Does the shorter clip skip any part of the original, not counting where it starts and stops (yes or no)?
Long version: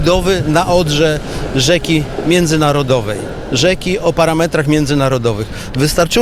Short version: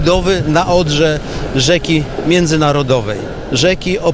no